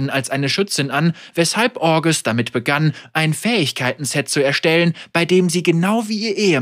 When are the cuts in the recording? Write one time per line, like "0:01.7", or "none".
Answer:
none